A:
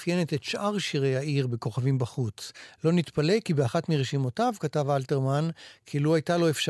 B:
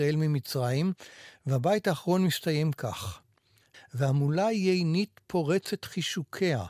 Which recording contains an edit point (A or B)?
B